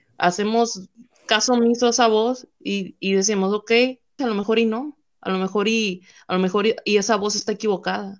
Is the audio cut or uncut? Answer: cut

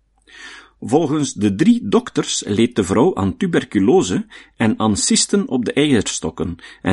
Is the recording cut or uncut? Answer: uncut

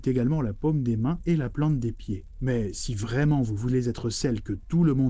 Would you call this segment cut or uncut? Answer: uncut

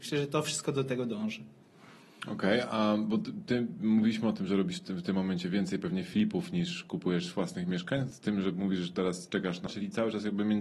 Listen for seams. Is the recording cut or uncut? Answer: cut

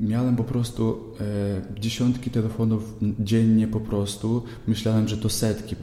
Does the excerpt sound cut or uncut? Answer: uncut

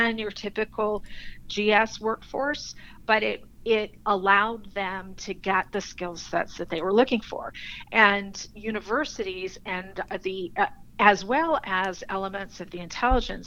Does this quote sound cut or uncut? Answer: cut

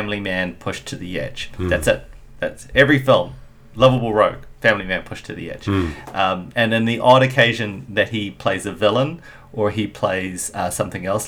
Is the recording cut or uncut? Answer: uncut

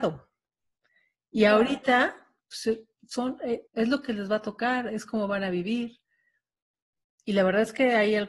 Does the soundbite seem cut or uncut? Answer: cut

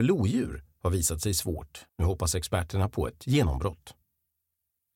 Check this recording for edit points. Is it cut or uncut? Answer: cut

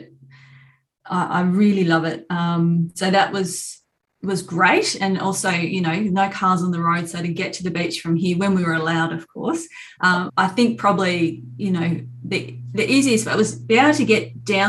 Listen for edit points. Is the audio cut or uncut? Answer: cut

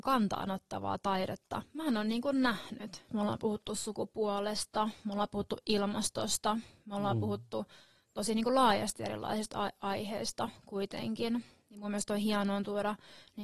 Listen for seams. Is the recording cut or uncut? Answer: cut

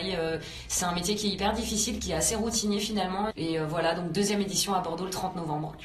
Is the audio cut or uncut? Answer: cut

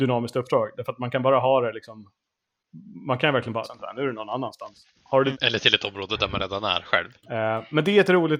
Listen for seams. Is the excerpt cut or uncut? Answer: cut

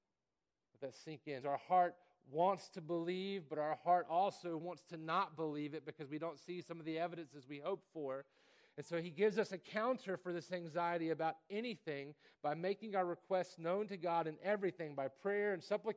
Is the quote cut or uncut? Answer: cut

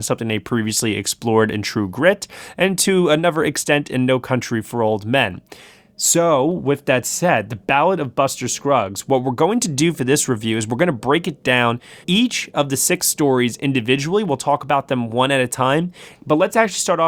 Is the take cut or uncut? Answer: cut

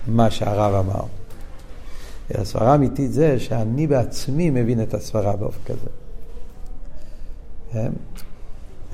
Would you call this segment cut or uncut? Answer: uncut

